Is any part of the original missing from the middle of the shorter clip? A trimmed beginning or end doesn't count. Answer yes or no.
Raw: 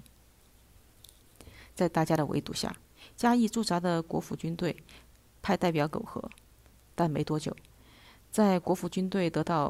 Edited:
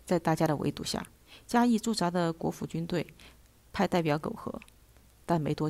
no